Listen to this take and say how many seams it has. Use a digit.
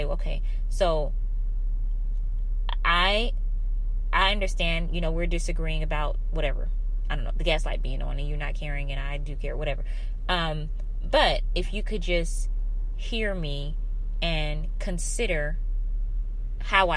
0